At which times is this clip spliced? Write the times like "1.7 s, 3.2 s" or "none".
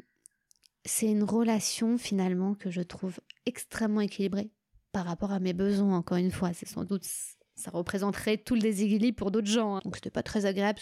9.8 s